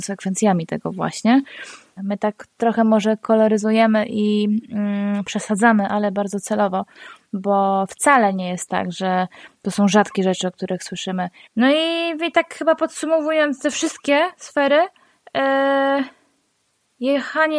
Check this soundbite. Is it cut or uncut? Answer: cut